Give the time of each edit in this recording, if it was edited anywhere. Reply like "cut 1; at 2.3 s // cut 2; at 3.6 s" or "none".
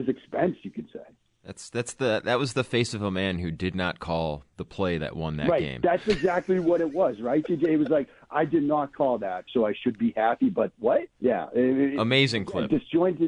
cut 1; at 9.5 s // cut 2; at 11.1 s